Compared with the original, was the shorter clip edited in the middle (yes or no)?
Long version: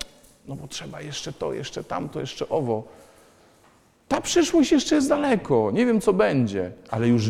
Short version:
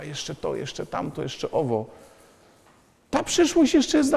no